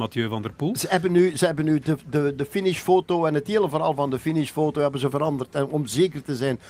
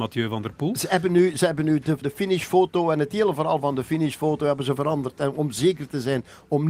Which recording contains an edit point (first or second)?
second